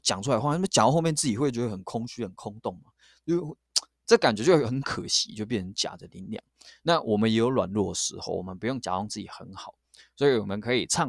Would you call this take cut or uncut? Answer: cut